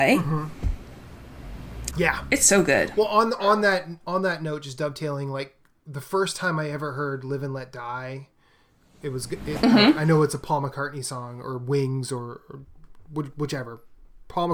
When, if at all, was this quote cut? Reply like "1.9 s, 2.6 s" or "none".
1.9 s